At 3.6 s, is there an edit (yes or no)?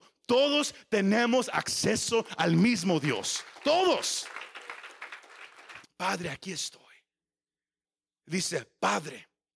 no